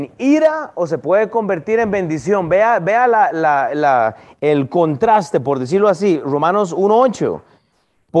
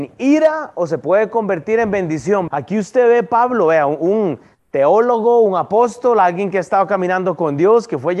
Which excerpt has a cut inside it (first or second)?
second